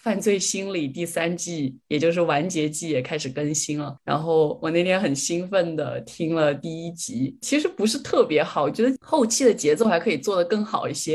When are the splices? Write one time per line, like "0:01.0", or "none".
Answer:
none